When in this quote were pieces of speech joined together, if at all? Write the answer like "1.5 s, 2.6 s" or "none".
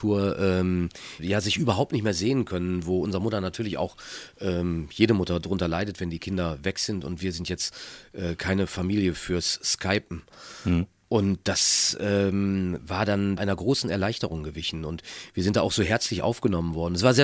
1.2 s, 13.4 s